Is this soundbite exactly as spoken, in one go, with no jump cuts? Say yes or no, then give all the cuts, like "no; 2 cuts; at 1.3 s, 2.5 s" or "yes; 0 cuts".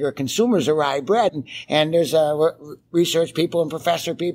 no; 1 cut; at 1.3 s